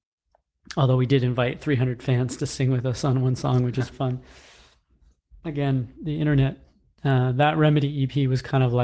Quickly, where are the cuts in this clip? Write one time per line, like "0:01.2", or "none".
0:03.9
0:07.0